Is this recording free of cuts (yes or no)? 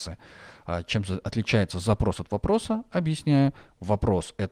yes